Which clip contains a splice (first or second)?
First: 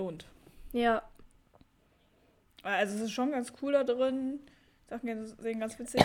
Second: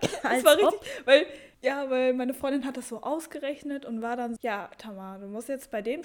second